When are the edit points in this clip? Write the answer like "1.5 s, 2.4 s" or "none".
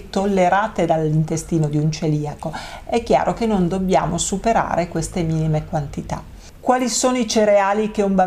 none